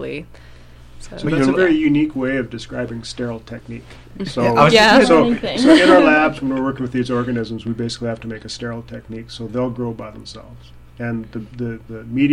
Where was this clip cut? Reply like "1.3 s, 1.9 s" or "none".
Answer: none